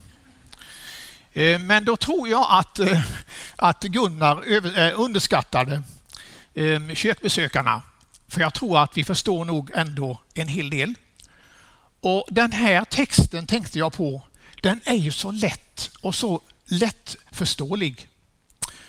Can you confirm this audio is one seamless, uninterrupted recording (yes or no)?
yes